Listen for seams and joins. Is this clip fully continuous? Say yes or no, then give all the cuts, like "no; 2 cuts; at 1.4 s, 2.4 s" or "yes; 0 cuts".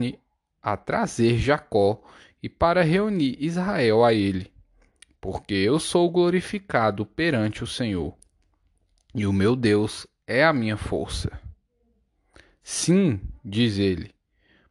yes; 0 cuts